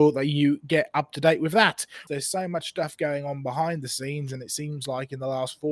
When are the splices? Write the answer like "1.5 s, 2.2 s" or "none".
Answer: 2.1 s